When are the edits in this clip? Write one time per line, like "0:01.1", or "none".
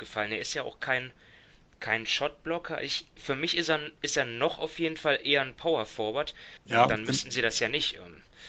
0:06.6